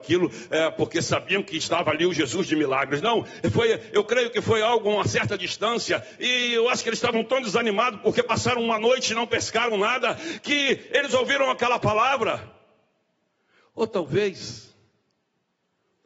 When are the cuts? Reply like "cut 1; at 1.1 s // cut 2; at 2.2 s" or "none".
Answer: none